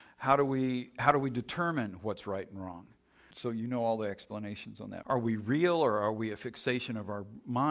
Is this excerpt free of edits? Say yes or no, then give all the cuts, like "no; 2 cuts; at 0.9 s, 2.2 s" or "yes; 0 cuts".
no; 2 cuts; at 3.3 s, 5.0 s